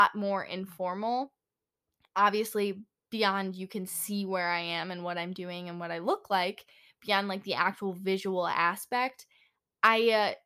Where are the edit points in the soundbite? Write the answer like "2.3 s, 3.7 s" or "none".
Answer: none